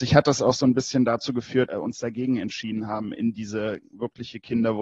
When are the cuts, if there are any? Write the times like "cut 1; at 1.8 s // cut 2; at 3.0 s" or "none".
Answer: cut 1; at 1.7 s